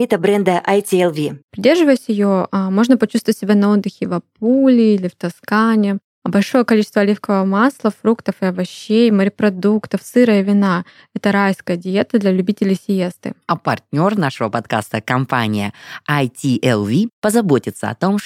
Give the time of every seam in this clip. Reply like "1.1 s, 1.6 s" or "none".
1.5 s